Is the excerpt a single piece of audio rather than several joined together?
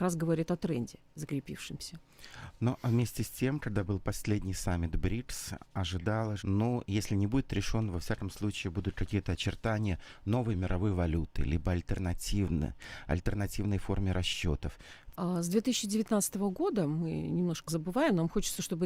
no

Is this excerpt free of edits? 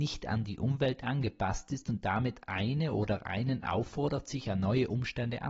yes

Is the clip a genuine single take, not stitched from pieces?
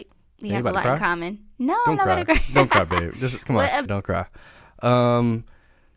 no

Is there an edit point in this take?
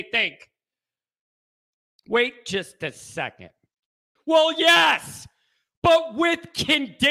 yes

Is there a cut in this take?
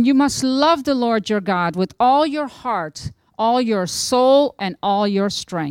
yes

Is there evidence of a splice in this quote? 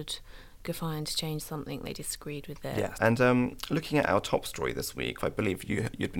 yes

